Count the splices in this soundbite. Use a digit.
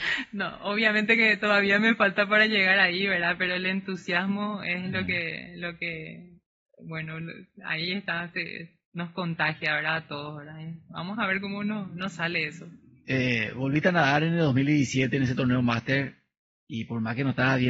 0